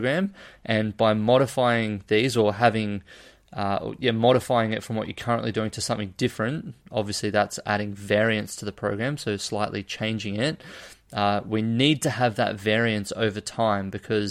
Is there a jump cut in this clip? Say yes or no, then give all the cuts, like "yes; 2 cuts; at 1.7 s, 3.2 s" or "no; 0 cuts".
no; 0 cuts